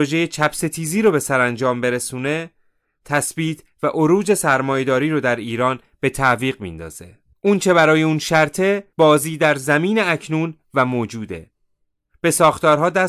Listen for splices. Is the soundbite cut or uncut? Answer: cut